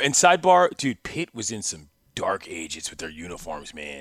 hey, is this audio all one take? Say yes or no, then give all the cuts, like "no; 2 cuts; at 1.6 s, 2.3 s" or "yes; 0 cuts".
yes; 0 cuts